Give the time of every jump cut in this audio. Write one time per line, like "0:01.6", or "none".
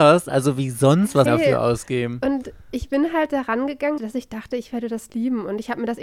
0:01.3
0:04.0

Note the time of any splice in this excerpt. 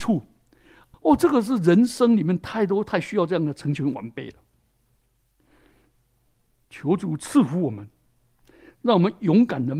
0:00.9

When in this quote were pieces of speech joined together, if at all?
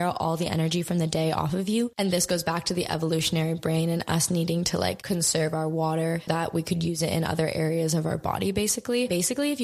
0:01.9
0:06.3

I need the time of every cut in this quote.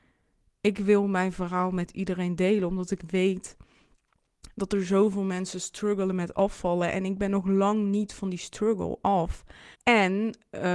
0:09.7

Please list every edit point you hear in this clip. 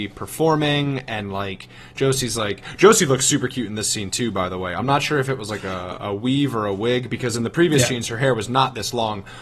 none

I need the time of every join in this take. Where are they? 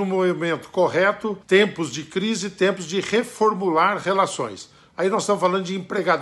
0:01.4

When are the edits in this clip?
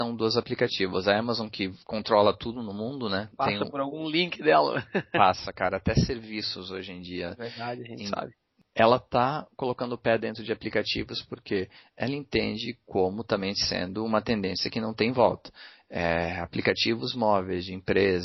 0:03.3

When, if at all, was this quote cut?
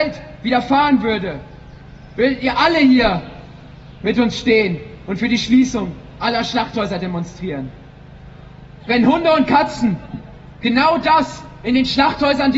0:08.8

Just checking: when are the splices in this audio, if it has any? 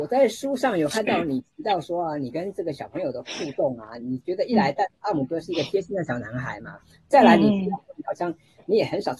0:04.2

